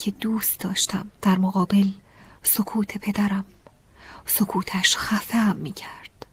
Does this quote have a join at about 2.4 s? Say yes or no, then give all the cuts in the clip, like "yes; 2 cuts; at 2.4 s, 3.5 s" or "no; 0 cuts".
no; 1 cut; at 1.1 s